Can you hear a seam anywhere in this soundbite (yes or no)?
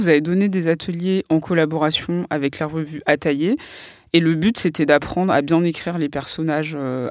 no